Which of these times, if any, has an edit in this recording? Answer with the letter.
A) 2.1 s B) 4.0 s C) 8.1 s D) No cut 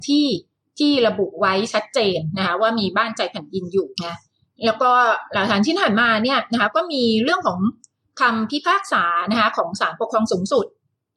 B